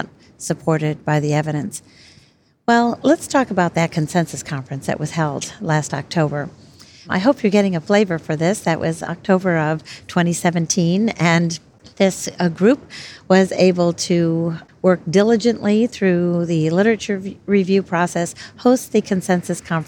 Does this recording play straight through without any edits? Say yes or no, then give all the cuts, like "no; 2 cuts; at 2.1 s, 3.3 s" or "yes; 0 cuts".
yes; 0 cuts